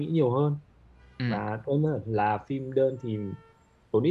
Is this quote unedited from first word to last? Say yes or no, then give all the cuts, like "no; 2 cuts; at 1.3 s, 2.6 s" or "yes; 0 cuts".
yes; 0 cuts